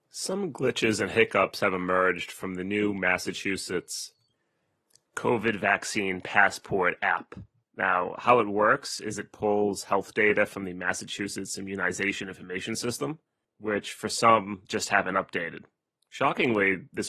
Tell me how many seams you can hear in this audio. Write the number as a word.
two